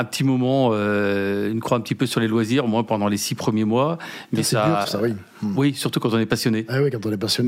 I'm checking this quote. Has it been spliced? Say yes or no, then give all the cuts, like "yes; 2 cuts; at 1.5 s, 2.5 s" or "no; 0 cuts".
yes; 1 cut; at 4.8 s